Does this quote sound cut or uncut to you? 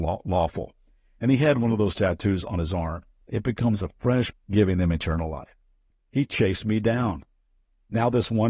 cut